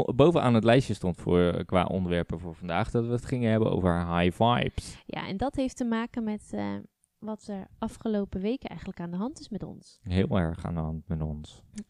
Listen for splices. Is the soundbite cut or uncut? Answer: uncut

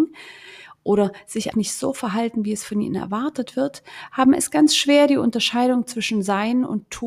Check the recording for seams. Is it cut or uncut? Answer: cut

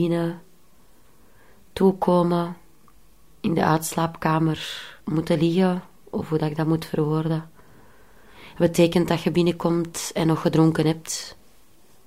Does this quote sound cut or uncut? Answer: cut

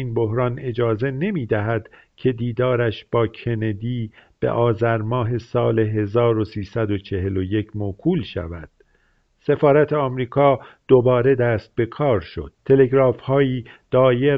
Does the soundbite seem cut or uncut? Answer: cut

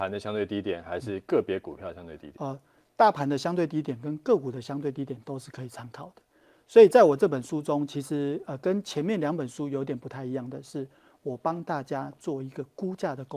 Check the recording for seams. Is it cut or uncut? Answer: uncut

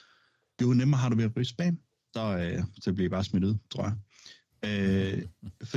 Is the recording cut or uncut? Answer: cut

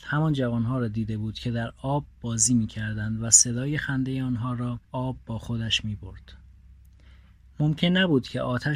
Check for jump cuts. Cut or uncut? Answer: cut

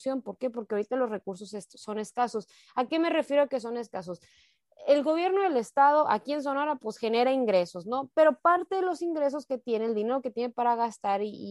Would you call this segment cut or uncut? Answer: uncut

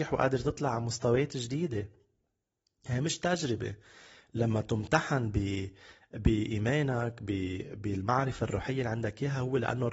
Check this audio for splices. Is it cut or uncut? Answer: uncut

